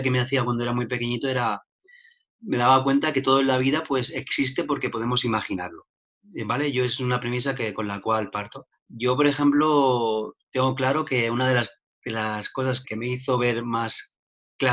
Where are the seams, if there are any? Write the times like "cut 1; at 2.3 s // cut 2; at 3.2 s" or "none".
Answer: cut 1; at 8.7 s // cut 2; at 12.8 s

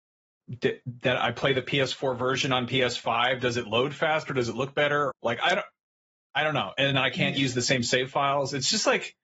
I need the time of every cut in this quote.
cut 1; at 5.1 s

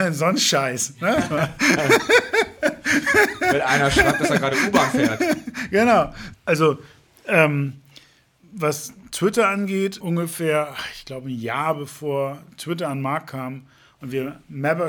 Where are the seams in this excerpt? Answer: cut 1; at 6.3 s // cut 2; at 10.0 s

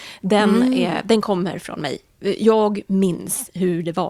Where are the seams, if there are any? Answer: none

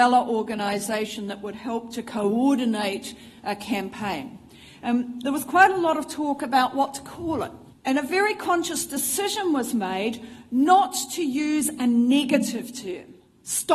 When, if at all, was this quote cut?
none

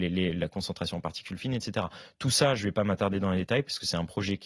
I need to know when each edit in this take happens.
none

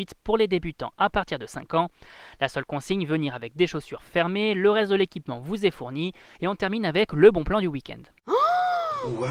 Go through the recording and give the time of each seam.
cut 1; at 6.3 s

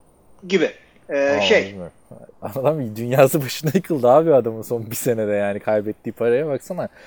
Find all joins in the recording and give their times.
cut 1; at 2.3 s

